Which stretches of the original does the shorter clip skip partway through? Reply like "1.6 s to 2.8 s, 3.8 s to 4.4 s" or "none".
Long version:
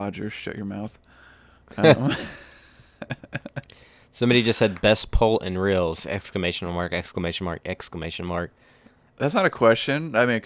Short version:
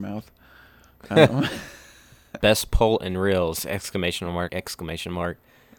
3.1 s to 4.8 s, 6.9 s to 7.6 s